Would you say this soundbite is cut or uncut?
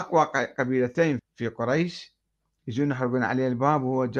cut